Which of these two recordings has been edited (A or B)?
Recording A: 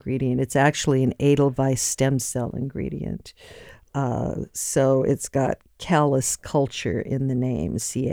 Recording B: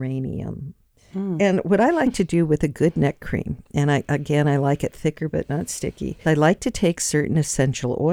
B